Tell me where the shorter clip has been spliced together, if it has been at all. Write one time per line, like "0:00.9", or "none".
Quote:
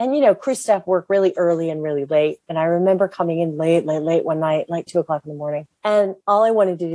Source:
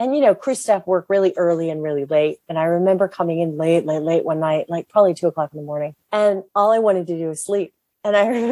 0:04.9